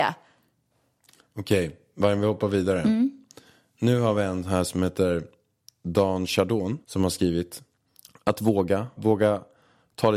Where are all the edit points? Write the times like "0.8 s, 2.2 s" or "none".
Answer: 6.8 s, 9.0 s

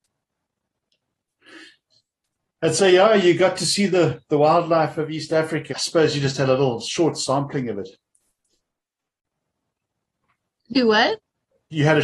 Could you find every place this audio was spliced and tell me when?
5.7 s

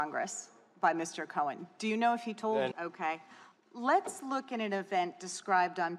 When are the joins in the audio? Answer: 2.7 s

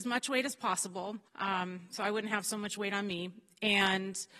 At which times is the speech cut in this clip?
1.3 s

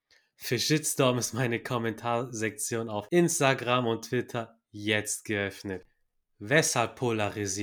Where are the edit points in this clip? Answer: none

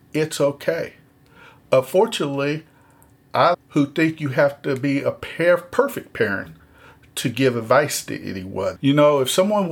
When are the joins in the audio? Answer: 3.5 s, 8.8 s

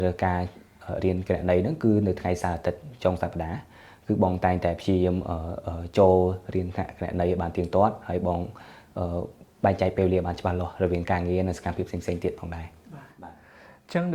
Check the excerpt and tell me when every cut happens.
none

